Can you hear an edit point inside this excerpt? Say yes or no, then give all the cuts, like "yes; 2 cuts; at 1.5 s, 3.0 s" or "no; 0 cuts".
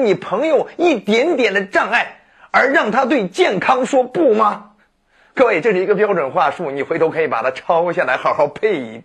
no; 0 cuts